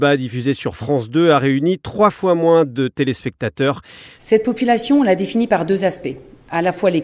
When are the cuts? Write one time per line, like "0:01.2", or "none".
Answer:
0:04.2